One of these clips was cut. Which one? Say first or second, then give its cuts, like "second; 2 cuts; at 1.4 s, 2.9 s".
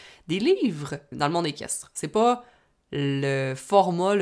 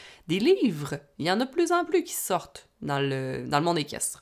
first; 1 cut; at 1.1 s